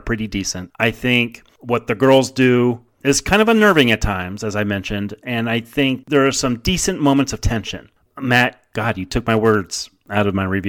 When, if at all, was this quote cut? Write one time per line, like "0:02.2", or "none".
0:08.1